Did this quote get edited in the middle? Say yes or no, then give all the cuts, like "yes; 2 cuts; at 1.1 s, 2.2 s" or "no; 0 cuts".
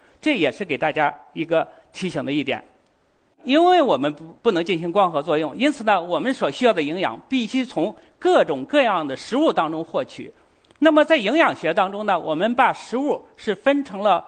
no; 0 cuts